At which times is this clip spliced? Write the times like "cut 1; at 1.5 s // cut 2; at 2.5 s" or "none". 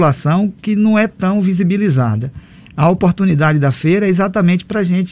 none